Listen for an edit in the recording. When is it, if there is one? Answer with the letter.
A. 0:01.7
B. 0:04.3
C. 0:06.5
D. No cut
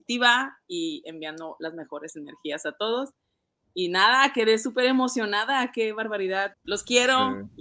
C